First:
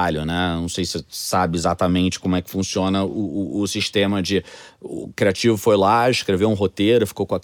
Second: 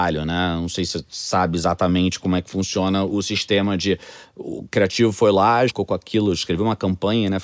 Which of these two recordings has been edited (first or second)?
second